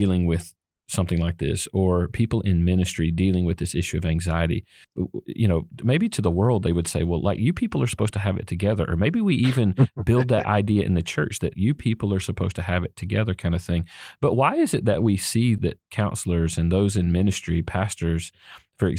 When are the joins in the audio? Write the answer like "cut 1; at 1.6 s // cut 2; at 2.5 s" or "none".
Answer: cut 1; at 11.5 s // cut 2; at 15.6 s